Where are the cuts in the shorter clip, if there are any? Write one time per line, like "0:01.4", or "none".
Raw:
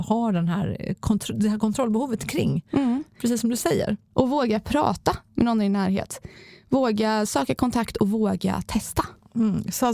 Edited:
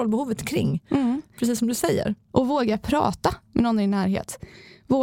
none